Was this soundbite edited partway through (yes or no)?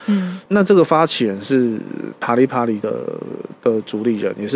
no